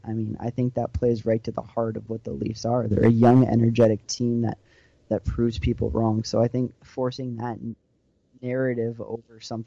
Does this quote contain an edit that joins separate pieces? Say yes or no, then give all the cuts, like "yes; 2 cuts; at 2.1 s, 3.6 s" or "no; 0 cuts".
no; 0 cuts